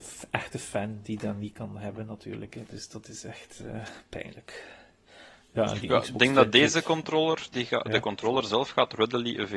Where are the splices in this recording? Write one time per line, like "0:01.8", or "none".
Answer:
0:02.5